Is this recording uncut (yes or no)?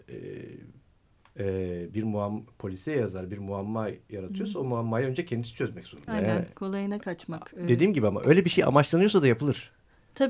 no